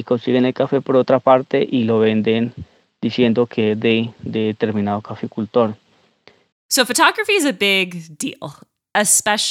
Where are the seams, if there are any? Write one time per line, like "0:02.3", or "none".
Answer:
0:06.5